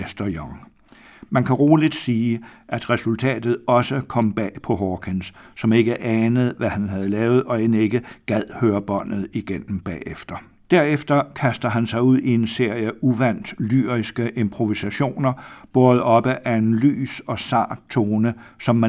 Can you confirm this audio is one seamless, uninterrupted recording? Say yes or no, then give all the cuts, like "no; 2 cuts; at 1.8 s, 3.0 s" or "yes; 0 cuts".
no; 1 cut; at 10.6 s